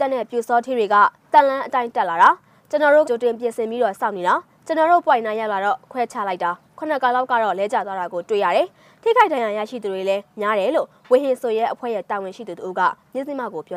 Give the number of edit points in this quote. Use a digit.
1